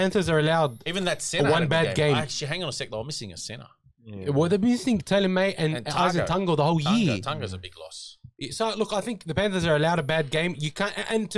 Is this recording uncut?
yes; 0 cuts

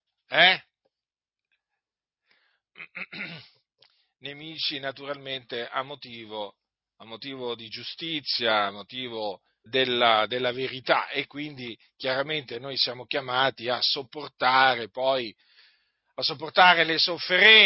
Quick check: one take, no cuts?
no; 1 cut; at 9.7 s

